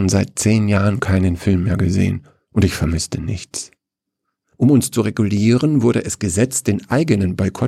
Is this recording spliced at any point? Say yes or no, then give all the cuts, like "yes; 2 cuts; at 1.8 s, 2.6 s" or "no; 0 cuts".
yes; 1 cut; at 4.4 s